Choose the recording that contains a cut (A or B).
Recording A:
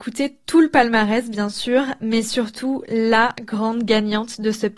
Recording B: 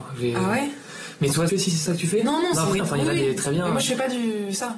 B